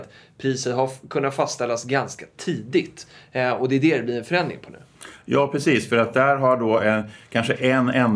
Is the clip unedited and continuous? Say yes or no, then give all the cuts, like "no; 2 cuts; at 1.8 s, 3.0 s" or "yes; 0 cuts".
yes; 0 cuts